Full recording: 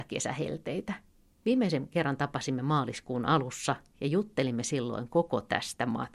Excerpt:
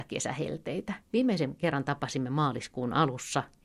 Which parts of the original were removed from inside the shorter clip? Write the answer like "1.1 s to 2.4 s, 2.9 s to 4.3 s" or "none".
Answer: 1.0 s to 1.3 s